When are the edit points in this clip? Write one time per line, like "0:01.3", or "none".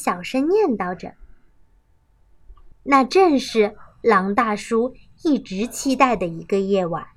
0:02.7